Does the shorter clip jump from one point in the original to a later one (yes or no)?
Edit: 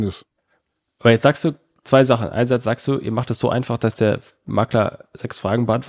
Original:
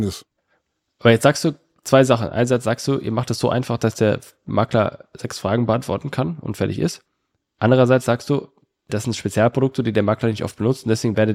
no